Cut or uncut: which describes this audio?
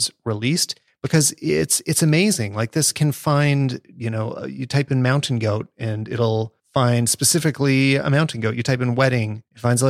uncut